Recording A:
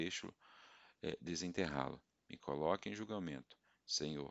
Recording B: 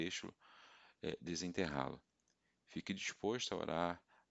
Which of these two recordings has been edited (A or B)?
A